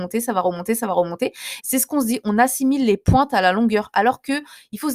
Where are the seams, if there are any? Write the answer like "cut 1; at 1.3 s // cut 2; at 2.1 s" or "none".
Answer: cut 1; at 1.6 s